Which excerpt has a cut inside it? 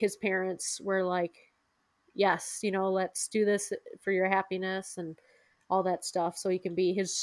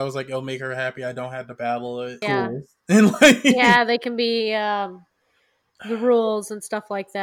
second; 1 cut; at 2.2 s

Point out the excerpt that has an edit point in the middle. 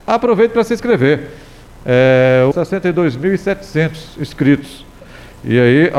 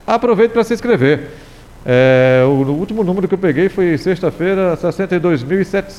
first; 1 cut; at 2.5 s

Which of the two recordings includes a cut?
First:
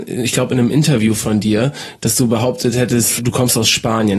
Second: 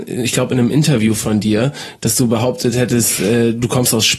first; 1 cut; at 3.2 s

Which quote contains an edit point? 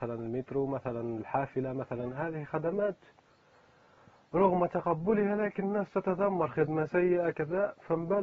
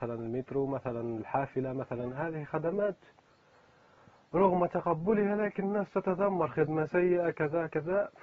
first; 1 cut; at 7.3 s

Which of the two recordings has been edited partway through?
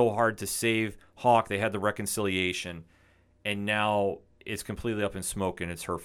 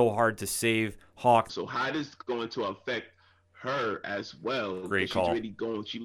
second; 1 cut; at 1.5 s

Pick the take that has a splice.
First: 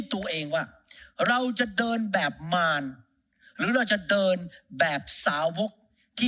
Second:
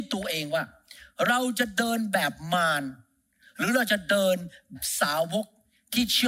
second; 1 cut; at 4.7 s

